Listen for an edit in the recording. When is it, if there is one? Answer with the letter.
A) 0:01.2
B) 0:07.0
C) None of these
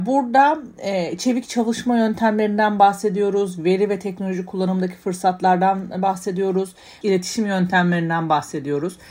B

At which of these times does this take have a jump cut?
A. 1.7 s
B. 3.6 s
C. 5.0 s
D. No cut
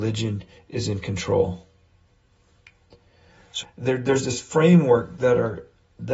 B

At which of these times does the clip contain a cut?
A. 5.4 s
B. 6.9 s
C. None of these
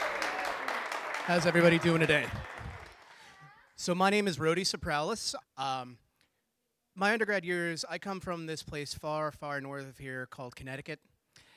A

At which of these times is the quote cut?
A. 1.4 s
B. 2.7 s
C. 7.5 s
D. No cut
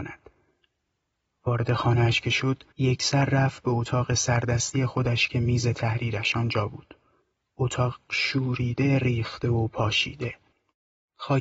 B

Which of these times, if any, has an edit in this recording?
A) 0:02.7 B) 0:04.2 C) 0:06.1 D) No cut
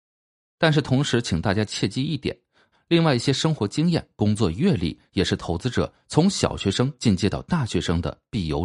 A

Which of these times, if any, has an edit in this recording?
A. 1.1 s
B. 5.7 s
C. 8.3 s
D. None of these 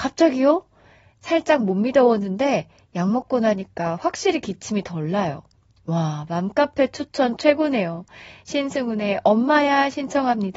D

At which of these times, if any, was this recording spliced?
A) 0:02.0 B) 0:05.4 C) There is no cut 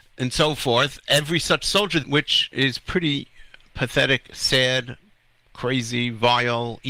A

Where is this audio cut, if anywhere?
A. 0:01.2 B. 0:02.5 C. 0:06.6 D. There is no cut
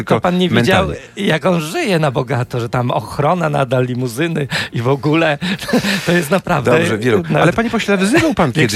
D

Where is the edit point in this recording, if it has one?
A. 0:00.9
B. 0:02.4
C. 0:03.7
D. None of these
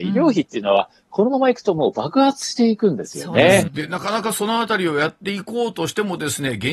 C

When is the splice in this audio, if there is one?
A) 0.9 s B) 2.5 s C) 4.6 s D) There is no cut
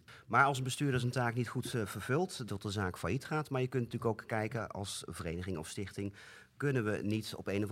B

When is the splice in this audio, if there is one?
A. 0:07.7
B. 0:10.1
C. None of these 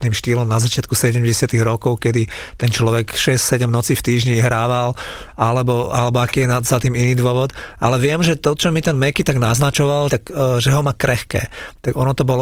B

